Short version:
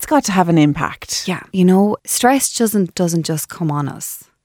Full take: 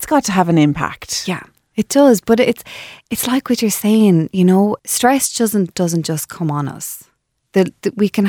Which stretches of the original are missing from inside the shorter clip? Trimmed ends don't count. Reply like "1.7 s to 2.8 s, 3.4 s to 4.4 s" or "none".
1.5 s to 4.3 s